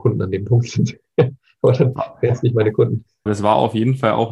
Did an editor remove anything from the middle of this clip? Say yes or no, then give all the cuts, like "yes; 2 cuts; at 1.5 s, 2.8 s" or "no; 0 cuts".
yes; 1 cut; at 3.3 s